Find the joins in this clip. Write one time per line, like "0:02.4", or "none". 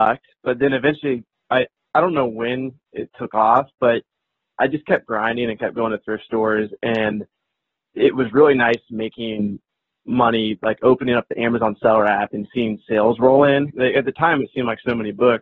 0:13.7

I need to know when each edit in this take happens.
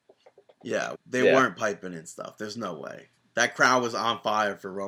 0:00.9

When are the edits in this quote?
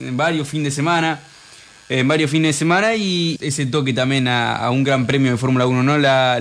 0:03.4

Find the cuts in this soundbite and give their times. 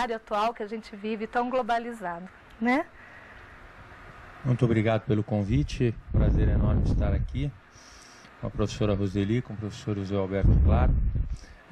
0:06.1

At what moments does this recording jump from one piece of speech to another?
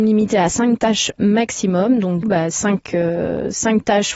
0:02.2

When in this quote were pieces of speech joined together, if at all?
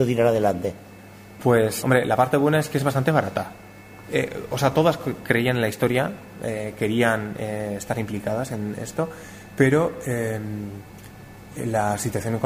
0:01.8
0:04.0

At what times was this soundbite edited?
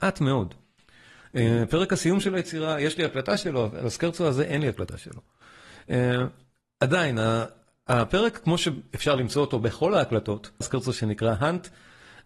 0:10.6

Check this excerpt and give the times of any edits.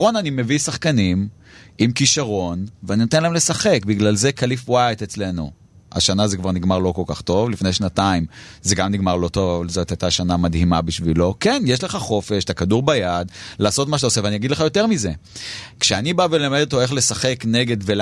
none

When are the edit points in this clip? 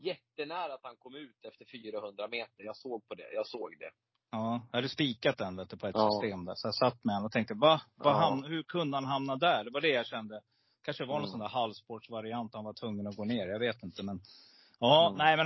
none

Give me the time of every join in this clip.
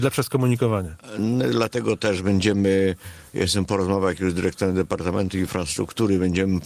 none

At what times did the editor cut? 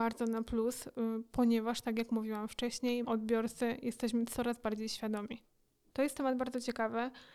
0:03.0
0:05.9

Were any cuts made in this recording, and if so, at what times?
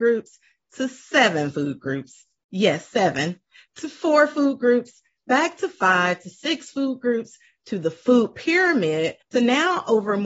0:09.2

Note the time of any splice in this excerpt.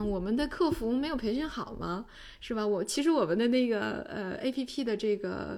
none

